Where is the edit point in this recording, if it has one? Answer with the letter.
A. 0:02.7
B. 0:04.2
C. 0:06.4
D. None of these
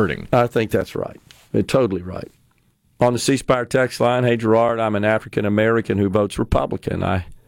D